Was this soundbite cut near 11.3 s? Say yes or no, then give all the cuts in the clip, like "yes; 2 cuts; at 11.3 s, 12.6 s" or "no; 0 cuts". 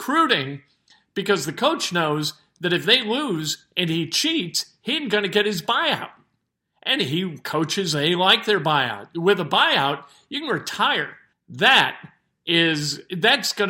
yes; 1 cut; at 11.3 s